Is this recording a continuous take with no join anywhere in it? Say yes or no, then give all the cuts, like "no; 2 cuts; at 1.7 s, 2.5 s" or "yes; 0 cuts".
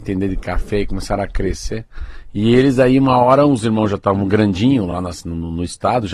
yes; 0 cuts